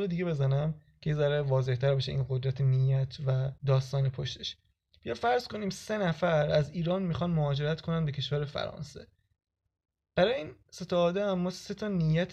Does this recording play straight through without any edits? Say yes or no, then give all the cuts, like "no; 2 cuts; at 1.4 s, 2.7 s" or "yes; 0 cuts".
no; 1 cut; at 3.6 s